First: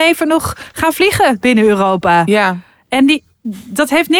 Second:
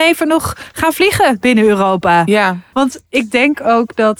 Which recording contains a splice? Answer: second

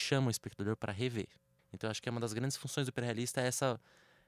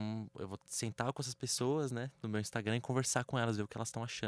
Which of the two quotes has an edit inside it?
first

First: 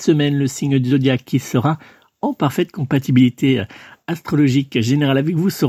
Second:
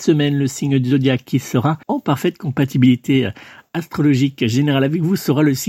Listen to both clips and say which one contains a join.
second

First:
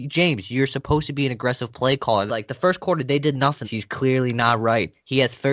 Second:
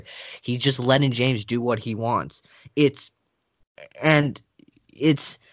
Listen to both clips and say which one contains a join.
first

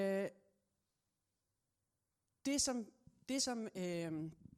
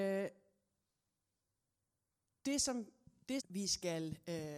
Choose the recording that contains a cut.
second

